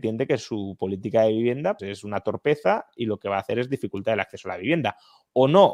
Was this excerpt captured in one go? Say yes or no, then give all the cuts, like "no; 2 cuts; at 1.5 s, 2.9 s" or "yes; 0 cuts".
no; 1 cut; at 1.8 s